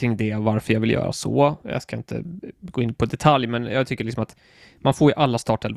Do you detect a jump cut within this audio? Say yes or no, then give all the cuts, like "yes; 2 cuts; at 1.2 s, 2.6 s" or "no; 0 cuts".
no; 0 cuts